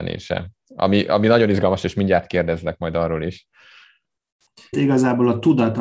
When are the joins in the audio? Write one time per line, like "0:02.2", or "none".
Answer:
0:04.7